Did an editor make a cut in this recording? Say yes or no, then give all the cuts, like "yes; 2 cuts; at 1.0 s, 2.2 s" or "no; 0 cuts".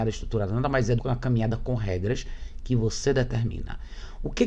yes; 1 cut; at 1.0 s